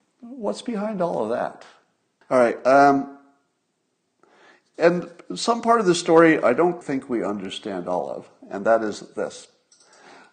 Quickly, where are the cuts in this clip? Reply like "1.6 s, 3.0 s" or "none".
2.2 s, 6.8 s